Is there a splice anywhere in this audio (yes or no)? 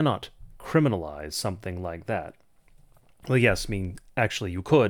no